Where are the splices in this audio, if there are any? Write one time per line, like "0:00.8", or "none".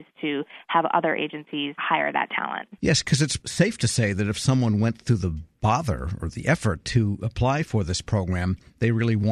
0:01.8
0:03.4